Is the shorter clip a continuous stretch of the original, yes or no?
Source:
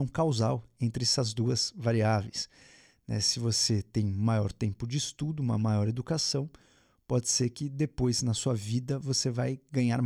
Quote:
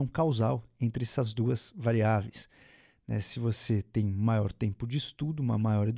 yes